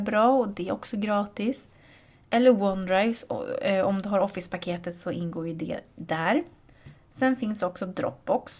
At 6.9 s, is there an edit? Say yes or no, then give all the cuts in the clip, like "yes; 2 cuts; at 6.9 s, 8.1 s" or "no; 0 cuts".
no; 0 cuts